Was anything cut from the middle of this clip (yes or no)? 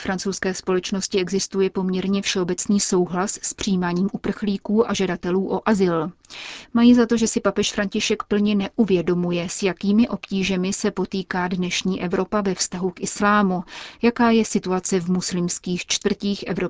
yes